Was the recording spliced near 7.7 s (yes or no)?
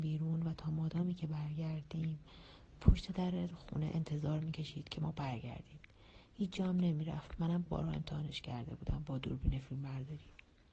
yes